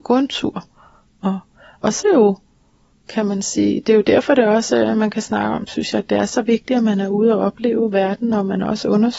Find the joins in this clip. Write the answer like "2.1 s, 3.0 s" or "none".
2.0 s